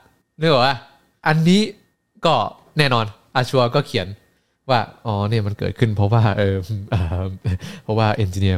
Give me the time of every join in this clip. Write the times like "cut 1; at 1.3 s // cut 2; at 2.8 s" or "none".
none